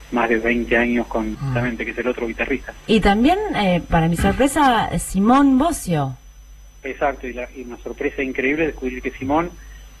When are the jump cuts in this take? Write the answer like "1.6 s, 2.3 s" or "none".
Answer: 1.3 s